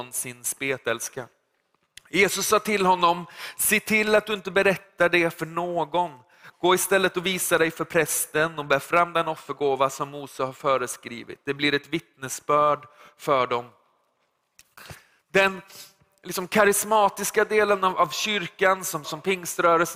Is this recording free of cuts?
no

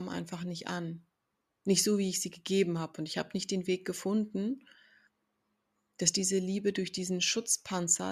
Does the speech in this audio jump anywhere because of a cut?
no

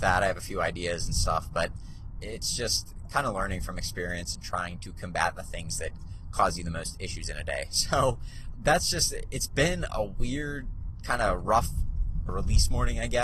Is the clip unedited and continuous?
no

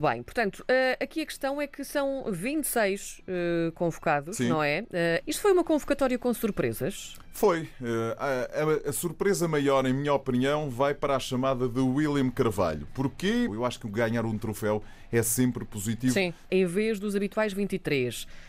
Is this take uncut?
no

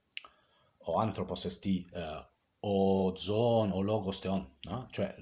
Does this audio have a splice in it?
no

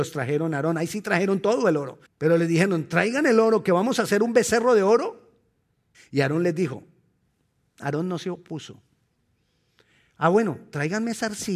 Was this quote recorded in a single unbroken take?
no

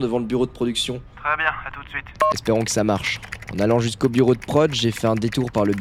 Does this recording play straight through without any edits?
yes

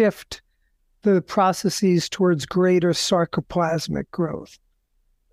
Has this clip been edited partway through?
no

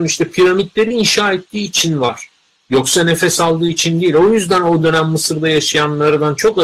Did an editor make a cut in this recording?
no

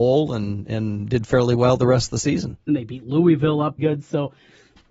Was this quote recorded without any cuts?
no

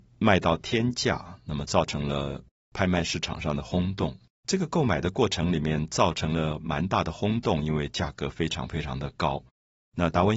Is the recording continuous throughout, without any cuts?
no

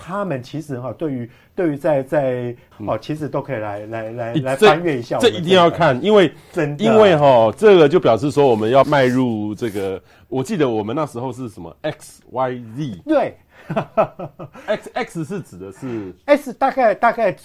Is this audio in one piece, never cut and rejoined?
no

